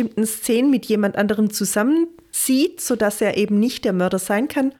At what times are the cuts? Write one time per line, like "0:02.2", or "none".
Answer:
none